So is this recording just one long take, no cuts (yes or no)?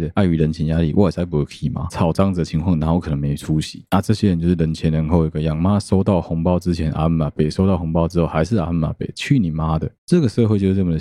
no